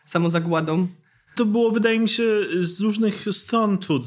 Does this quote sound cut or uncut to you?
uncut